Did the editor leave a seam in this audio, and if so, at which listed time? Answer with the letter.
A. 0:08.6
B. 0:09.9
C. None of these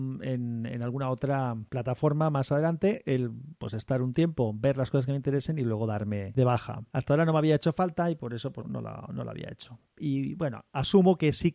A